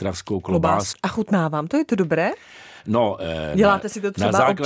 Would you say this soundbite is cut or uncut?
cut